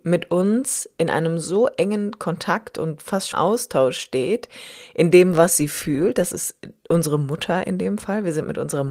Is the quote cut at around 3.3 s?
yes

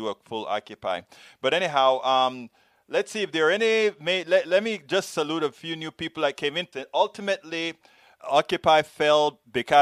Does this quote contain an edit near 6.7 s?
yes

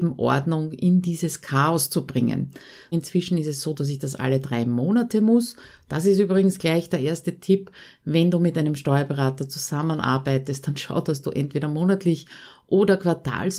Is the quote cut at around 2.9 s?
yes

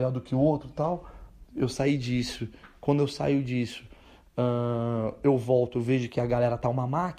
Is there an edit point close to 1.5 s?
no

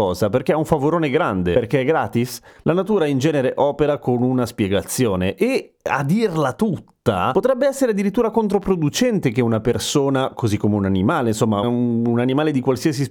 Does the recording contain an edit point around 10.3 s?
no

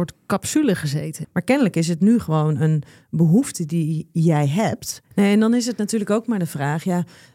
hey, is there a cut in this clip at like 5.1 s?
yes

